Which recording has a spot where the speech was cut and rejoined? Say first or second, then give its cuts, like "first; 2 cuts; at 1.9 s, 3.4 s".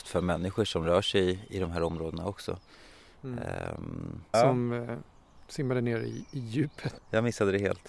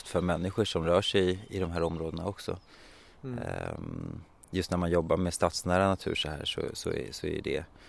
first; 2 cuts; at 4.3 s, 7.0 s